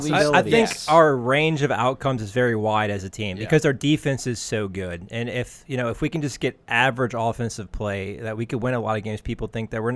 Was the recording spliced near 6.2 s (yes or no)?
no